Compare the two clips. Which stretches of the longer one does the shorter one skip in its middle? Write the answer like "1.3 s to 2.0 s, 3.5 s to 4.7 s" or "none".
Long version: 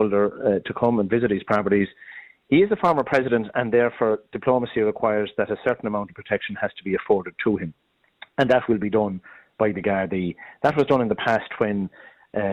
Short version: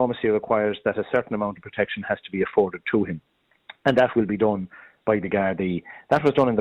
none